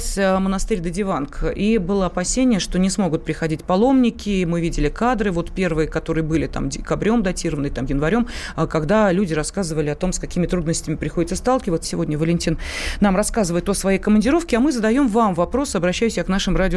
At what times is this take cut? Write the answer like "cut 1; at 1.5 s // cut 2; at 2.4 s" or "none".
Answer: cut 1; at 11.8 s